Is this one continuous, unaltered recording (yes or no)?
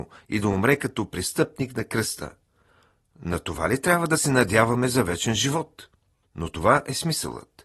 no